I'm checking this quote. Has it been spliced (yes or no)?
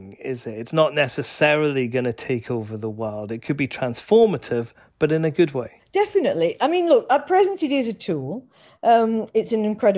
no